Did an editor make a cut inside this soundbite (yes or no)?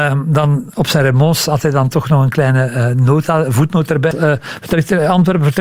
yes